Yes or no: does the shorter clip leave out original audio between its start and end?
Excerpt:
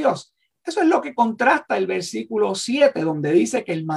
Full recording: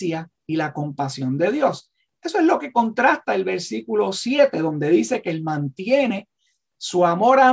no